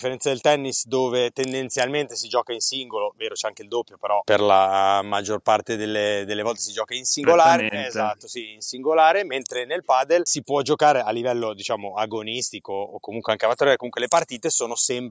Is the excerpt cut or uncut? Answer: uncut